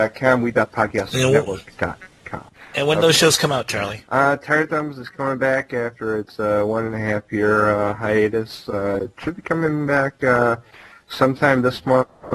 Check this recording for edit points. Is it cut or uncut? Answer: uncut